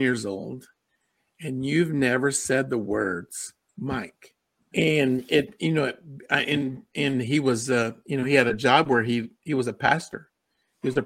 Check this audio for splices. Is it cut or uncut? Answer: cut